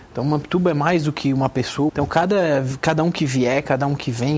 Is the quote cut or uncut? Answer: cut